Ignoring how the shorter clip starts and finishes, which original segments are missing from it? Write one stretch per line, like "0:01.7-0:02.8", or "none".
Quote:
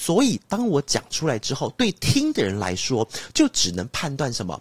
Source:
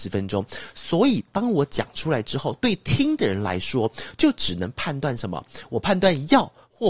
none